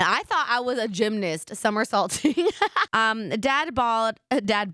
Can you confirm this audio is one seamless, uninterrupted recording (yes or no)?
no